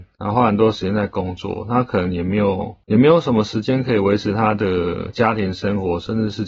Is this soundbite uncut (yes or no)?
yes